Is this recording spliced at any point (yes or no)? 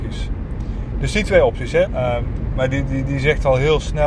yes